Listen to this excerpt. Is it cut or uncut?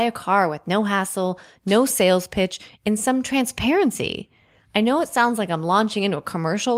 uncut